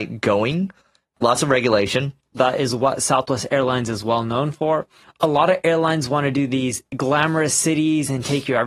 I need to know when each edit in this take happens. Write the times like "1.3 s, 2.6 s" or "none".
2.3 s